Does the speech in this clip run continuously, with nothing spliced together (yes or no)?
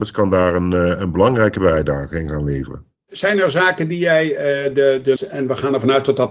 no